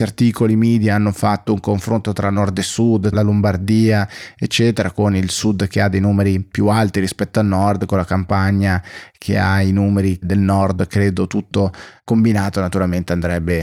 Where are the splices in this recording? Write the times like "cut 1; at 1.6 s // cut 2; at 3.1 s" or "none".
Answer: cut 1; at 3.1 s